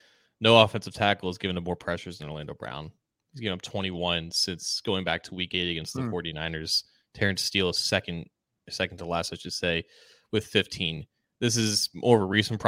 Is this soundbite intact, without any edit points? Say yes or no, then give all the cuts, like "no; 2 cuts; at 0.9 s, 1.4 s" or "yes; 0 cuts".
yes; 0 cuts